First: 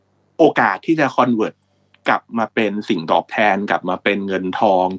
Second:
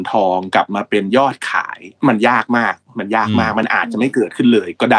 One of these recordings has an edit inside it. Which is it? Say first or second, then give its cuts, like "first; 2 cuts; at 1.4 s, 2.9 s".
second; 1 cut; at 2.0 s